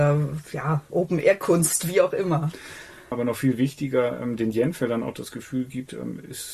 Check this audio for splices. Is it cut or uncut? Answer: cut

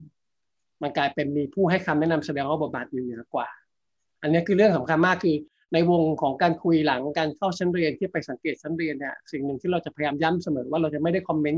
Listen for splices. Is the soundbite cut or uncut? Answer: uncut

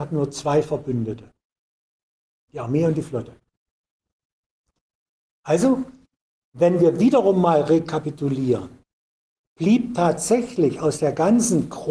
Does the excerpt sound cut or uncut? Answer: uncut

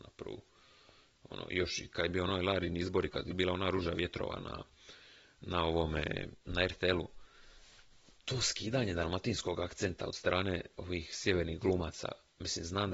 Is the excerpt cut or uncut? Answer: uncut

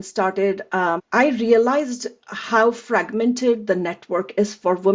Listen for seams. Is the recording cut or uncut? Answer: cut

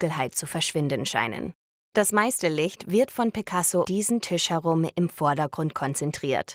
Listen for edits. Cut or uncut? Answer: cut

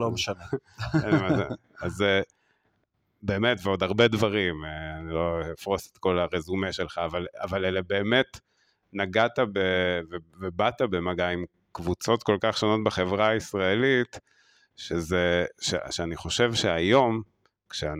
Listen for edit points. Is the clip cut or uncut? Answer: uncut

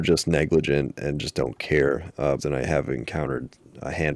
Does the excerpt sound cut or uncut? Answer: cut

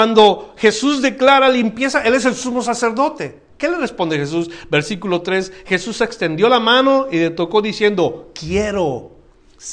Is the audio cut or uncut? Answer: cut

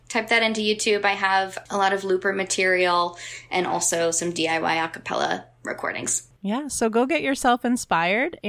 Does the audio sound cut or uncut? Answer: uncut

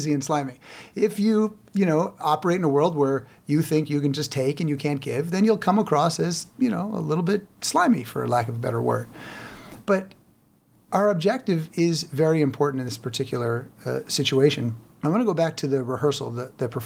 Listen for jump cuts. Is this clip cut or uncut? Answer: cut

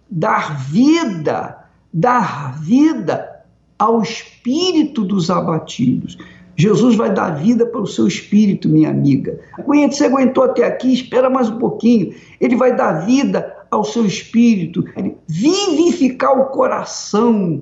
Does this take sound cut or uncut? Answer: cut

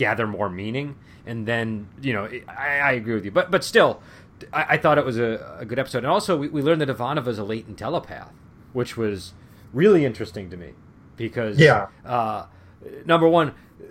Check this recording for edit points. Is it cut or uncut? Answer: uncut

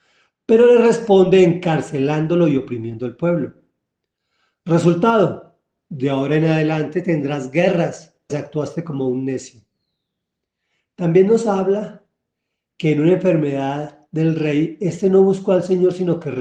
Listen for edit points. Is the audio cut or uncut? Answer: cut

